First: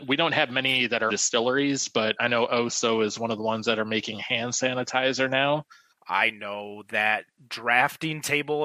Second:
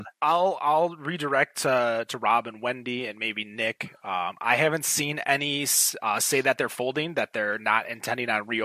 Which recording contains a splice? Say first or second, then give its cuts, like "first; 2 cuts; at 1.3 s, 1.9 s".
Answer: first; 2 cuts; at 1.1 s, 5.9 s